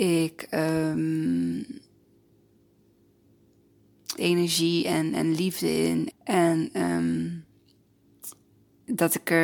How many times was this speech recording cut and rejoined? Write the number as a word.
two